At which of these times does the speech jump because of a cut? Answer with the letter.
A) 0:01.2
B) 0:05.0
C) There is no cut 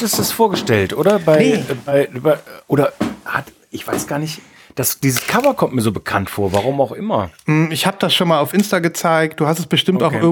C